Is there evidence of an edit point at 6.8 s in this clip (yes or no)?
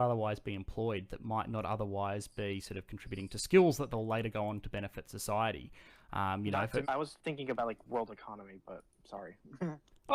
yes